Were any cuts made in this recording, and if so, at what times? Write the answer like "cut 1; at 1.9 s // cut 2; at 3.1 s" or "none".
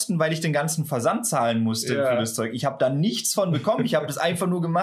none